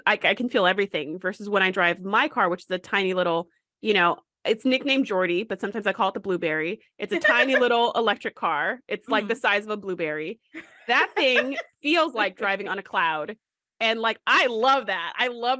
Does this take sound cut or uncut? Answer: uncut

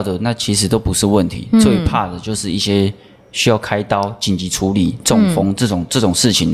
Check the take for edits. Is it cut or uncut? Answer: uncut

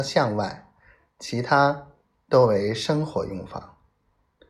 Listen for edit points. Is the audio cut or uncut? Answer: uncut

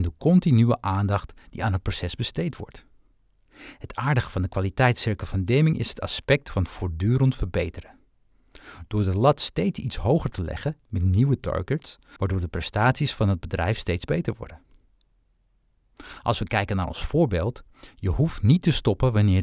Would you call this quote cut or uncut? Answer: cut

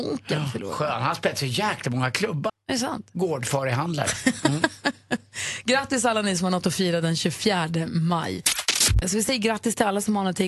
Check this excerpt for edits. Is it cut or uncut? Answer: cut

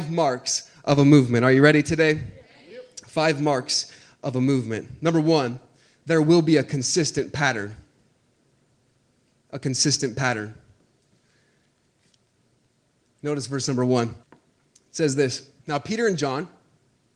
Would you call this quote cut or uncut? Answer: cut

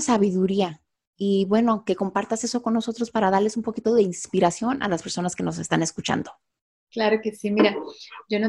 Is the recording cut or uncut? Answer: uncut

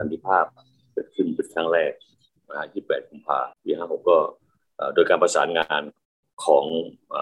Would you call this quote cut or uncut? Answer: cut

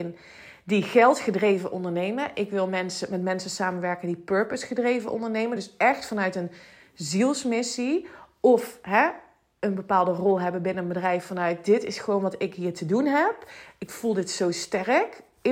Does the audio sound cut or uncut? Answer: uncut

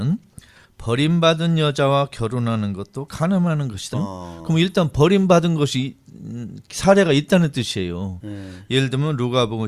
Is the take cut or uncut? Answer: cut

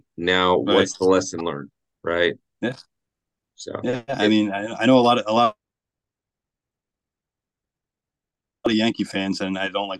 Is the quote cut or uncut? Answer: uncut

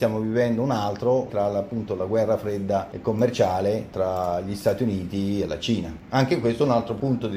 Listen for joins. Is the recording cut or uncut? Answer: uncut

